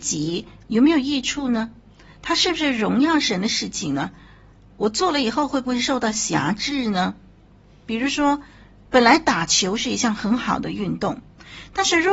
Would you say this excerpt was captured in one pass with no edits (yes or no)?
yes